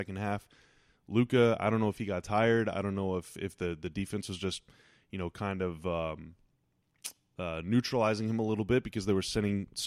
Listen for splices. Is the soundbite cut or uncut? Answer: uncut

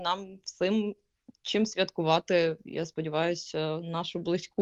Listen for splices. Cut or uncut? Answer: uncut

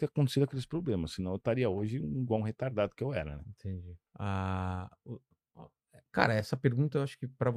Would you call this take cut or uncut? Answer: cut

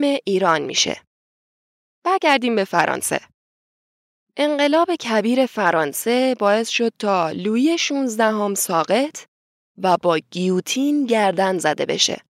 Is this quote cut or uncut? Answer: uncut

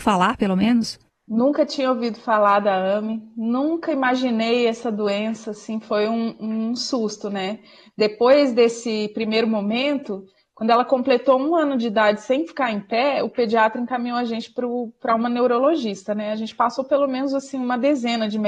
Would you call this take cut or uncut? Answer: uncut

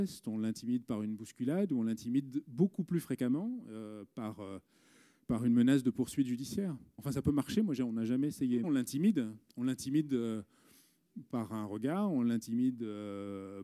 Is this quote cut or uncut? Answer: cut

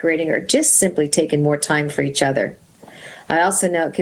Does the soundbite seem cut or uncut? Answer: uncut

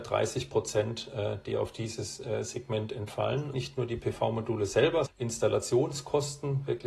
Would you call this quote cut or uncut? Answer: cut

